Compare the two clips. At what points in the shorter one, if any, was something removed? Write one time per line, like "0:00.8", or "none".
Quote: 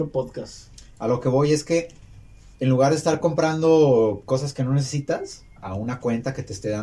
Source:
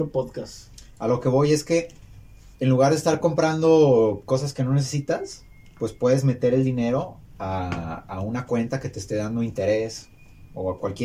0:05.6

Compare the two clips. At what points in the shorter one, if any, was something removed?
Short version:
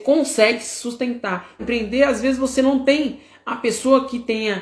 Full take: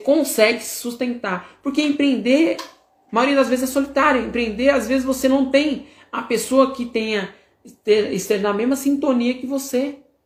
0:01.6

